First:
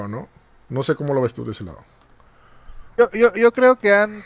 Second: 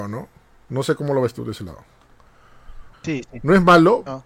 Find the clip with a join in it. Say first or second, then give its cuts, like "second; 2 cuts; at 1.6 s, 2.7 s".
second; 1 cut; at 2.9 s